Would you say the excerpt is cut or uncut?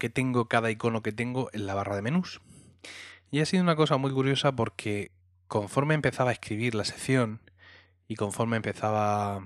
uncut